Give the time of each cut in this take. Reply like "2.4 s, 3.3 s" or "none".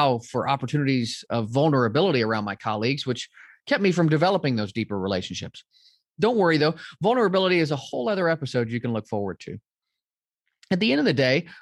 none